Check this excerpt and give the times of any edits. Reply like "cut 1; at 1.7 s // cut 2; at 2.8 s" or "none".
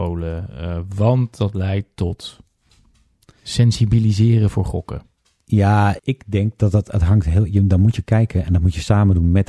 cut 1; at 6.0 s